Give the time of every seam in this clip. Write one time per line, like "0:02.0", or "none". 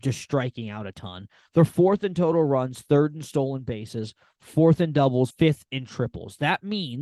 0:05.3